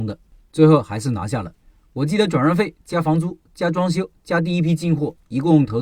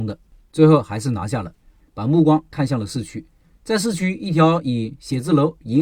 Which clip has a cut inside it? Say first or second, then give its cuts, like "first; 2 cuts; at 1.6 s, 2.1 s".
second; 1 cut; at 1.8 s